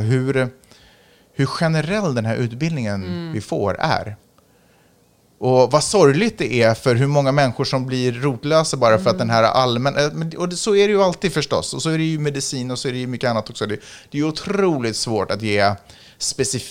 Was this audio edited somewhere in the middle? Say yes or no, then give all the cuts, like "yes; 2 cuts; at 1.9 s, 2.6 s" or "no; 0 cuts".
no; 0 cuts